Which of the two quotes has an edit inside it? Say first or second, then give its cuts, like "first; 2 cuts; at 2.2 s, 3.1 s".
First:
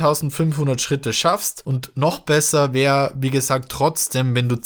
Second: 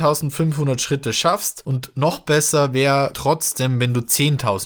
second; 1 cut; at 3.1 s